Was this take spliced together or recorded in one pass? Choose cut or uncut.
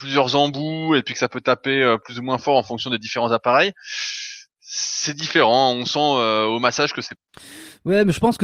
uncut